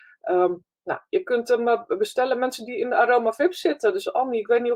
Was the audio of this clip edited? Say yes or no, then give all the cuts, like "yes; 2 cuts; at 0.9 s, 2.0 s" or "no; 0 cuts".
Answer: no; 0 cuts